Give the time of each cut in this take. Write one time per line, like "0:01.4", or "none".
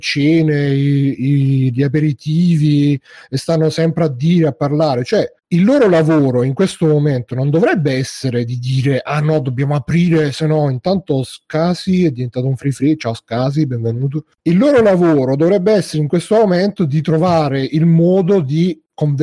none

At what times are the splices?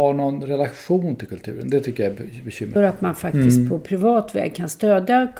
0:02.8

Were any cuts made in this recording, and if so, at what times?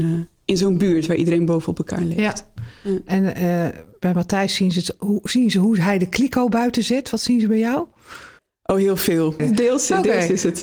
0:09.4

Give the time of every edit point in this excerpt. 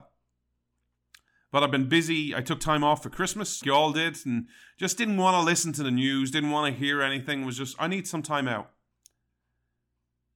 0:03.6

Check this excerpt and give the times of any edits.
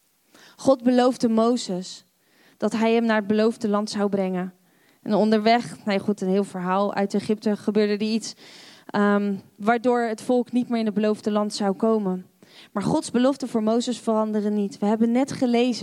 none

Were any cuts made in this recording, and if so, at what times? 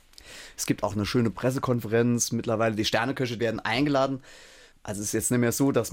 0:03.4

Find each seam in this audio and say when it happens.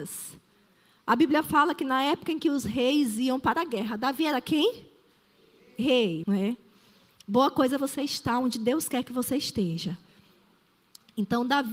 0:06.2

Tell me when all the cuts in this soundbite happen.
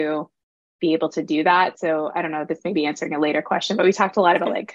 none

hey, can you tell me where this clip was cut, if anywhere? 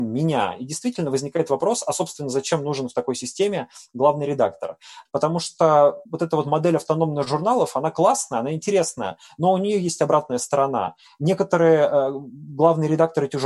0:05.1

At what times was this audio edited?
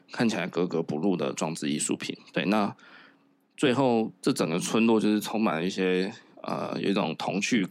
none

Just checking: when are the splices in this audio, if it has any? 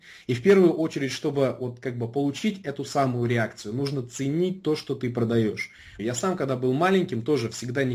0:06.0

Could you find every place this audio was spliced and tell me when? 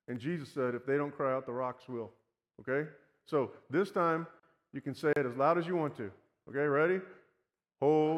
none

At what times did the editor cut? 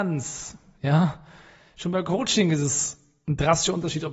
none

